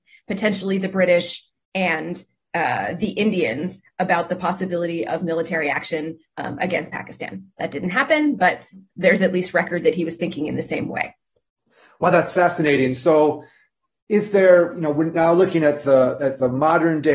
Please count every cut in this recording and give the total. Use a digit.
0